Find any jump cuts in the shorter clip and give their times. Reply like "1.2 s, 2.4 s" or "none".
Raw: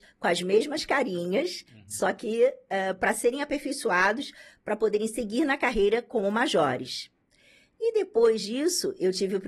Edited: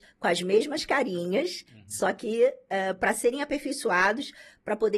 none